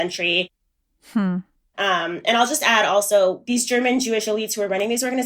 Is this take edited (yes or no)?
yes